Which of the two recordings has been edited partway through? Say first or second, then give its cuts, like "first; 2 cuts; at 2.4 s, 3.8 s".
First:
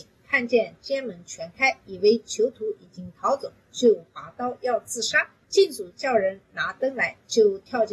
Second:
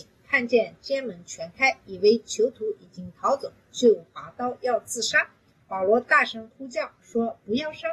first; 1 cut; at 5.4 s